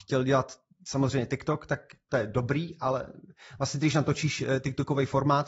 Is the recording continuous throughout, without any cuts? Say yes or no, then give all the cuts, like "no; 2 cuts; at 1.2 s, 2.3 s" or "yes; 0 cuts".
yes; 0 cuts